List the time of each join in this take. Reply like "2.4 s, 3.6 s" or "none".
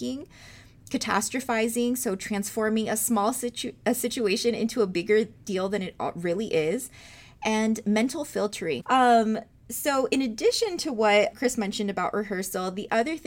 8.8 s, 11.3 s